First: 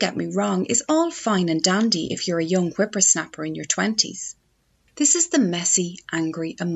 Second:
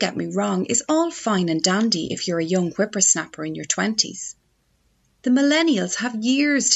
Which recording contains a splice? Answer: first; 1 cut; at 4.9 s

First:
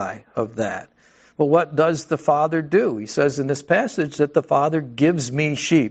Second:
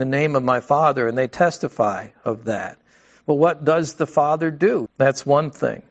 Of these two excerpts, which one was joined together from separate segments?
second; 1 cut; at 4.9 s

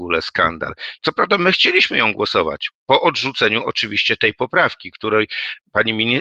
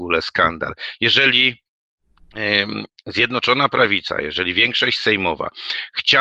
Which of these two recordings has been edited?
first; 1 cut; at 1.0 s

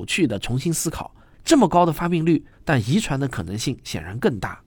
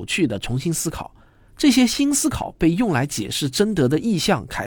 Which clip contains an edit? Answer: first; 2 cuts; at 1.3 s, 2.5 s

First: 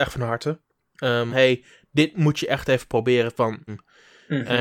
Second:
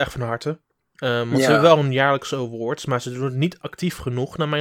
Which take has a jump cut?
first; 2 cuts; at 1.3 s, 3.7 s

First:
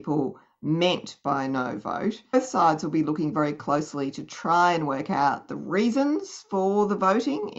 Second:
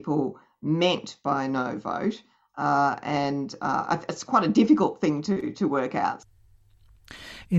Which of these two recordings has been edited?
first; 1 cut; at 2.3 s

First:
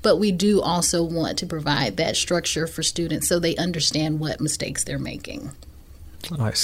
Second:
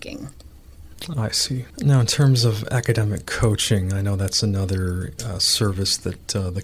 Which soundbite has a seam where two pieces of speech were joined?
second; 1 cut; at 1.7 s

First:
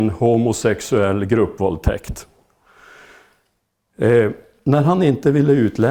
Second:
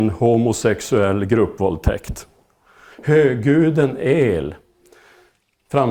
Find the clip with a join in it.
second; 1 cut; at 2.9 s

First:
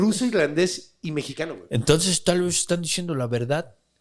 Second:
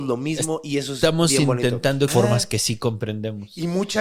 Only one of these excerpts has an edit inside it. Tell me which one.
second; 1 cut; at 2.1 s

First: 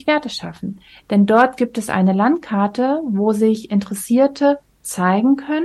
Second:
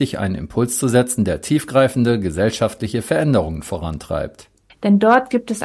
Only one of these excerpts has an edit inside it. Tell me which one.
second; 1 cut; at 4.7 s

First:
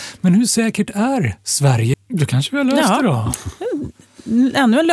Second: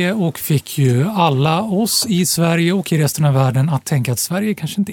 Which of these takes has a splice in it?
first; 1 cut; at 1.9 s

